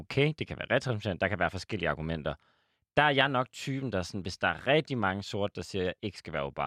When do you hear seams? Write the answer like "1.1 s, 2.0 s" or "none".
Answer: none